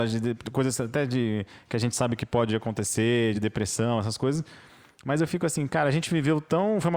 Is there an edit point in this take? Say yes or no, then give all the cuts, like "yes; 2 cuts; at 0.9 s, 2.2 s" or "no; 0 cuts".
no; 0 cuts